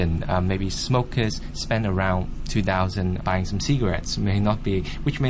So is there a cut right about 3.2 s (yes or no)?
yes